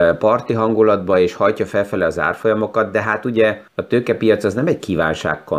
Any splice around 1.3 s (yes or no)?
no